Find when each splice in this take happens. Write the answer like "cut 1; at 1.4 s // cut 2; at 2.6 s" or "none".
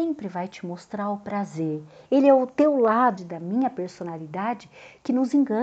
cut 1; at 2.1 s // cut 2; at 3.2 s